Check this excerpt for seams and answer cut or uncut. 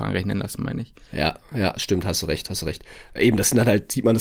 uncut